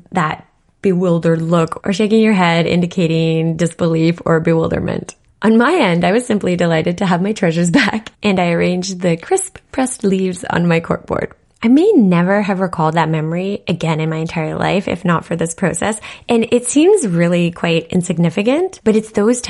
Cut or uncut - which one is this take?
uncut